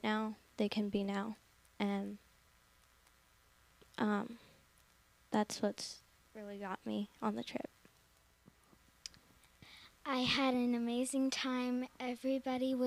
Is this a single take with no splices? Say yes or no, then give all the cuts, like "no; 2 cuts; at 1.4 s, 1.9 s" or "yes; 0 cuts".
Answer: yes; 0 cuts